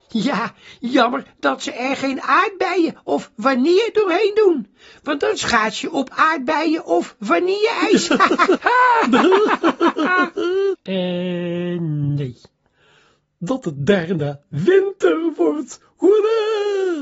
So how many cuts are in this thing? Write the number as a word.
two